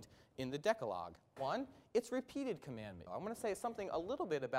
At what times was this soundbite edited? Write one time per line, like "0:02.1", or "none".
0:01.4
0:03.1